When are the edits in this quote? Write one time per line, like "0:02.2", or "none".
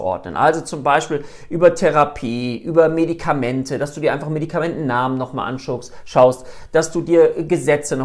none